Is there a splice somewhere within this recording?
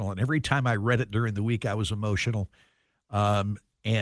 no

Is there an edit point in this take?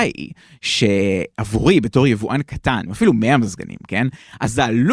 yes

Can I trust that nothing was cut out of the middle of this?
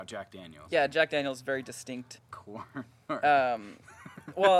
no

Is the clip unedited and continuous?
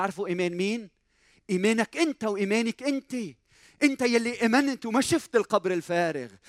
yes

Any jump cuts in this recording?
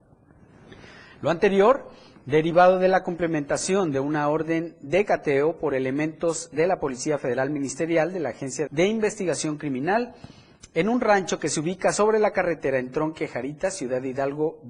yes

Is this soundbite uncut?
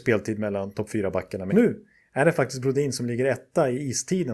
no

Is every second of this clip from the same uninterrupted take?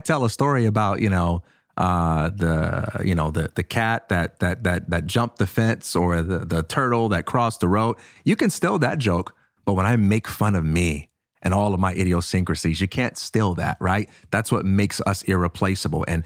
yes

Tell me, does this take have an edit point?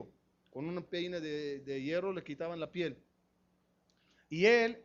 no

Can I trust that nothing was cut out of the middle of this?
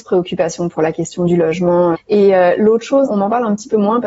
no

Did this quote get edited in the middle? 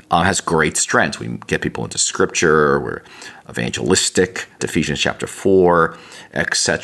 yes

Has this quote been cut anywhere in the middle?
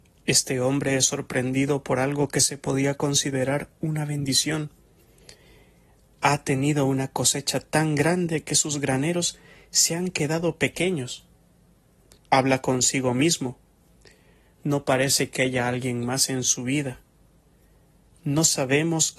yes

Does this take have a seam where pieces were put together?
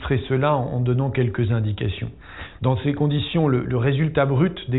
yes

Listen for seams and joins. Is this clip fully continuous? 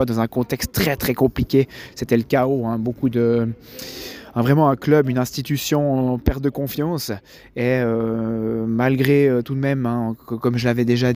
yes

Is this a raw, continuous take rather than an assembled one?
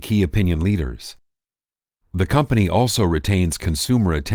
no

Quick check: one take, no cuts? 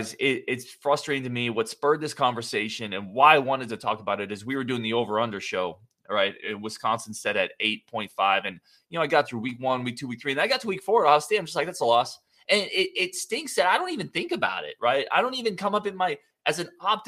yes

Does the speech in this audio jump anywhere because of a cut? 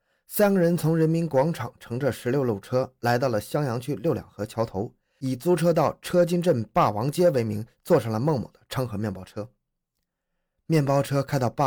no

